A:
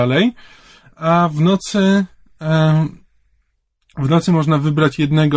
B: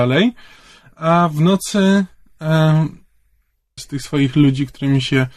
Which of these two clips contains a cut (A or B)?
B